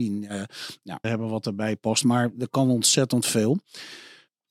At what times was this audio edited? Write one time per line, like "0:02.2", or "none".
0:01.0